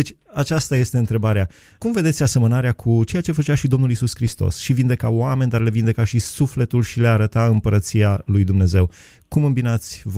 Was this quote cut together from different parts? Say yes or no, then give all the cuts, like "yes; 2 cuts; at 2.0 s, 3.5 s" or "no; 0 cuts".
no; 0 cuts